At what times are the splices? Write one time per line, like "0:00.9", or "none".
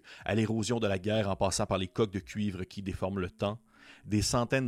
none